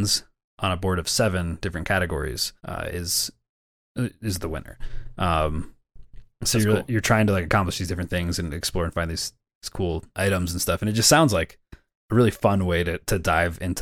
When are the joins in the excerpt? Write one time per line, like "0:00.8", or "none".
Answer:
0:02.6
0:10.1